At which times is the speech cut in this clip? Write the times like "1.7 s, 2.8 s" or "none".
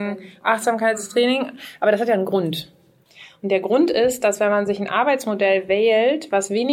none